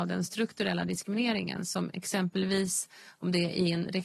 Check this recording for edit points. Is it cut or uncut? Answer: uncut